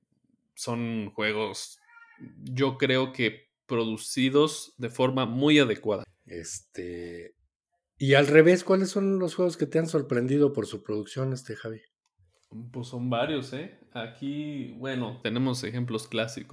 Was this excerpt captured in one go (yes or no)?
no